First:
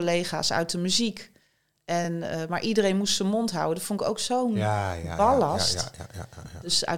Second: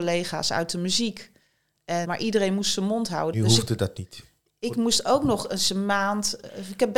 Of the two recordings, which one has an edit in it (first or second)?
second